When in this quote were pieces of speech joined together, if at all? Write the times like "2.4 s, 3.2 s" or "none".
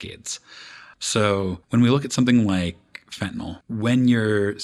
0.9 s, 3.6 s